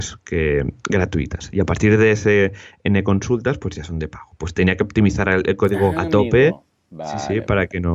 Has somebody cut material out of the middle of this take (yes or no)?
yes